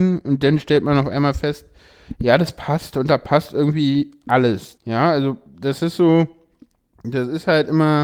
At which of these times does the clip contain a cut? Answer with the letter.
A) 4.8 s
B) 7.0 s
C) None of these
A